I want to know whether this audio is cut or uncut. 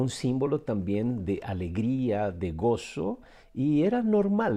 uncut